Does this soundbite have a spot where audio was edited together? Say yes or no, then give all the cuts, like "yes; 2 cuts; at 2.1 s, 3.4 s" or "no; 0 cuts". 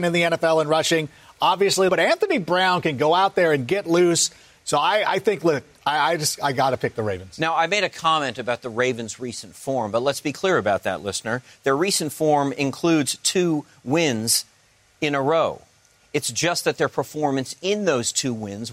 yes; 1 cut; at 1.9 s